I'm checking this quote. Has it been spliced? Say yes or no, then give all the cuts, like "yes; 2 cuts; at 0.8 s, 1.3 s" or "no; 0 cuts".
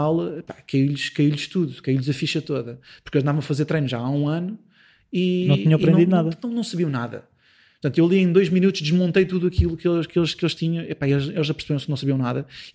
no; 0 cuts